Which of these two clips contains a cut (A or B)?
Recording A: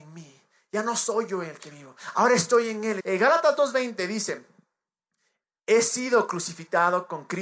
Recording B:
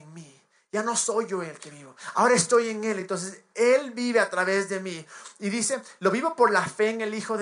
A